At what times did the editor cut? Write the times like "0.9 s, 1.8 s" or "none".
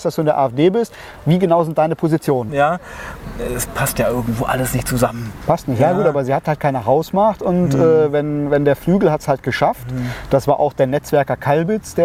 2.5 s